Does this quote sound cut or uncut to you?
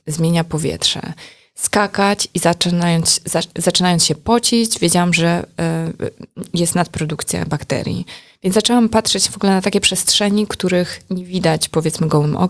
uncut